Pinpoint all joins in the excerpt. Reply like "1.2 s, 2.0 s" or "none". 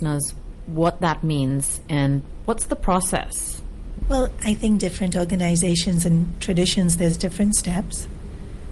4.0 s